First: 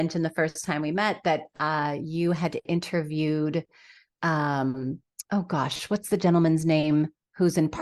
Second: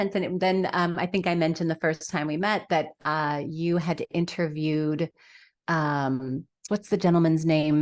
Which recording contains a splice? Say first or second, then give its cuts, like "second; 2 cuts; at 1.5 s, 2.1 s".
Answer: second; 1 cut; at 6.7 s